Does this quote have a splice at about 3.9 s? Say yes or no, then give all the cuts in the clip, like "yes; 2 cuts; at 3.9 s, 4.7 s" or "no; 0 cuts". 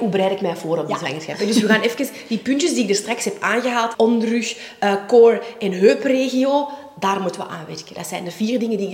yes; 1 cut; at 3.9 s